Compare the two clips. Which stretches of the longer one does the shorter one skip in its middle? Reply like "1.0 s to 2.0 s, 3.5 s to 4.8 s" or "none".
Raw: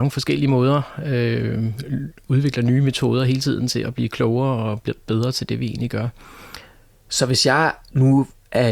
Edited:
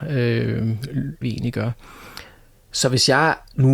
2.2 s to 5.6 s